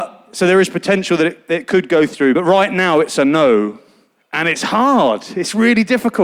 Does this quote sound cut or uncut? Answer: uncut